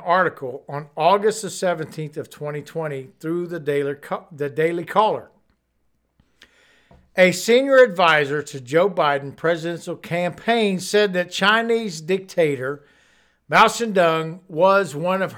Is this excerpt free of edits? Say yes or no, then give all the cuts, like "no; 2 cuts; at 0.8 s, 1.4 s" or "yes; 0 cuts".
yes; 0 cuts